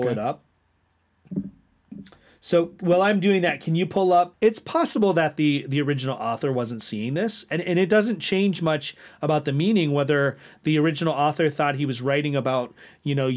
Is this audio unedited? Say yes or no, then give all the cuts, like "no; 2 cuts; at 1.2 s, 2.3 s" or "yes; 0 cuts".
no; 1 cut; at 4.3 s